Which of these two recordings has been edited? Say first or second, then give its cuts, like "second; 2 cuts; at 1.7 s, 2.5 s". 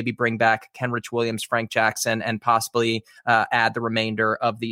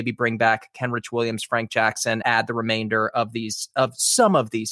second; 1 cut; at 2.2 s